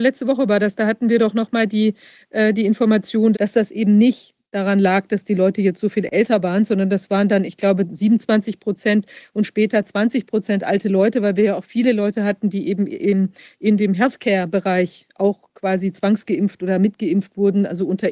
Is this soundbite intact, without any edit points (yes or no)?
no